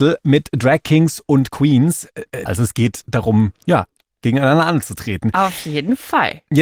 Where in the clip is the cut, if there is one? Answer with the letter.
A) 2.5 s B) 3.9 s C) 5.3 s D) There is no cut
A